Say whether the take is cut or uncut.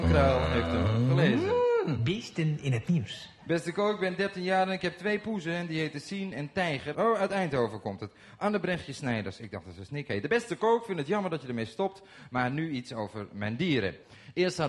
cut